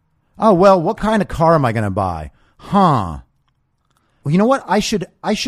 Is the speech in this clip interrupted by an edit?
yes; 1 cut; at 4.2 s

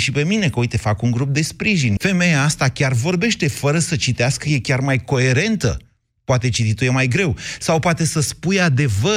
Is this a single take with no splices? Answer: no; 1 cut; at 2.0 s

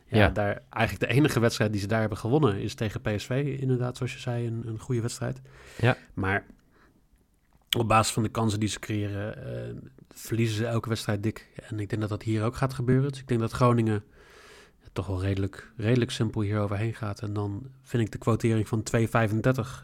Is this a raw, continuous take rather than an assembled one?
yes; 0 cuts

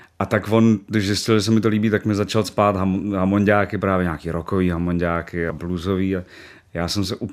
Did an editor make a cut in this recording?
yes; 1 cut; at 5.5 s

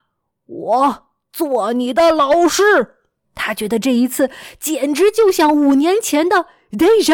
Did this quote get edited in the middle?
yes; 1 cut; at 3.2 s

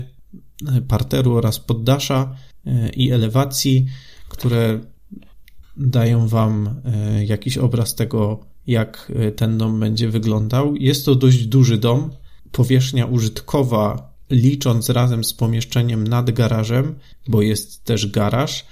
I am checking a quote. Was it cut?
no; 0 cuts

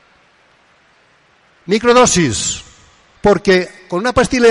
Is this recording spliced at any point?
yes; 1 cut; at 3.1 s

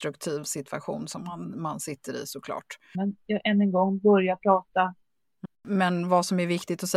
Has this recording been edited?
yes; 2 cuts; at 2.9 s, 5.4 s

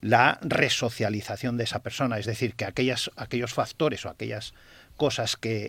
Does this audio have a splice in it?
no; 0 cuts

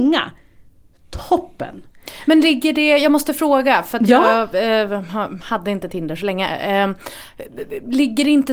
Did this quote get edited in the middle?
no; 0 cuts

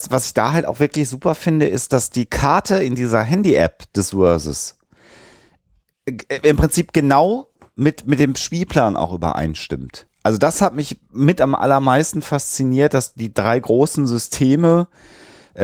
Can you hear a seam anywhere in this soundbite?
no; 0 cuts

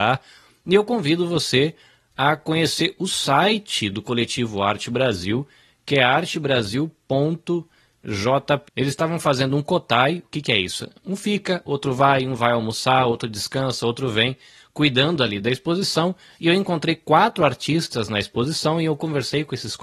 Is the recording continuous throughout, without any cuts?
no; 1 cut; at 8.6 s

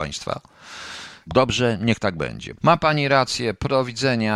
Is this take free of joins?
no; 2 cuts; at 1.3 s, 2.6 s

